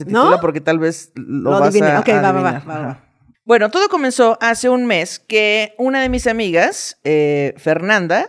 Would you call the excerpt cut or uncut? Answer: cut